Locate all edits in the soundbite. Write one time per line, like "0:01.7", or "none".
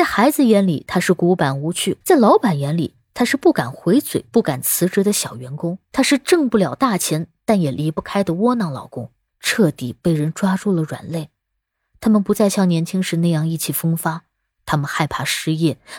0:02.0
0:05.9
0:09.3